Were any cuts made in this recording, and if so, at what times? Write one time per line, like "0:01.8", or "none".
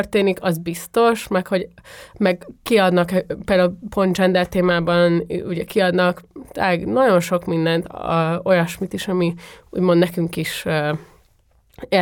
none